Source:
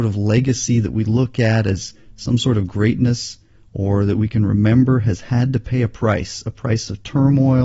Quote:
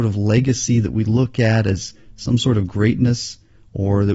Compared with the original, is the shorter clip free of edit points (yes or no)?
yes